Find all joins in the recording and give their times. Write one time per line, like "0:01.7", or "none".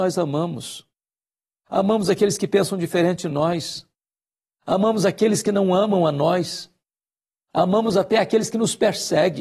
none